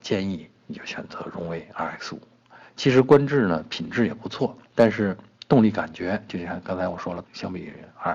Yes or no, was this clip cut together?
yes